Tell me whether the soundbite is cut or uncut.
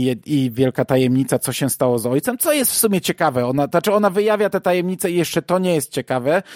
uncut